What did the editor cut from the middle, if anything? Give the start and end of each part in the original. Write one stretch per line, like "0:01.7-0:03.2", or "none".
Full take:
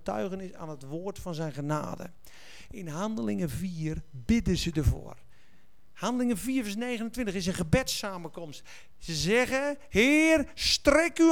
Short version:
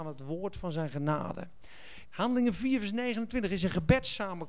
0:02.7-0:05.9